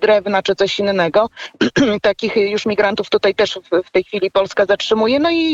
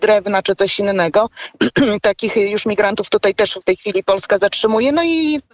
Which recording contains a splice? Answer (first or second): second